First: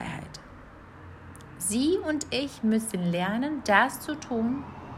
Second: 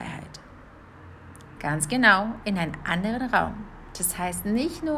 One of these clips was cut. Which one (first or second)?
second